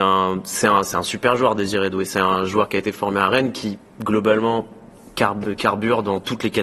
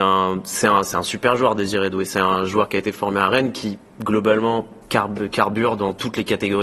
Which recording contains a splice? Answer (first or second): second